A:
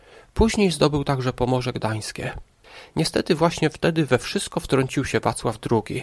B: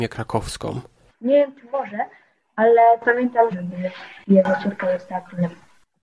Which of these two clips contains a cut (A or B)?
B